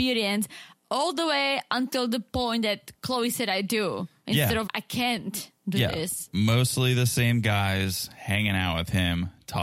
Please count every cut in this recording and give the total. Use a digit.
1